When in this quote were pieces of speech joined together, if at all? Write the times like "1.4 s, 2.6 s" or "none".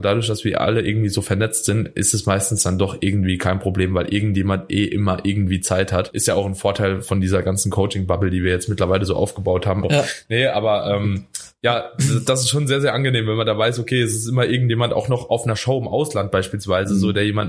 9.8 s